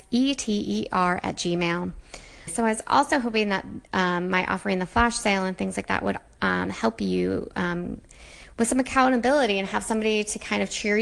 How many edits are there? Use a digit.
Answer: 1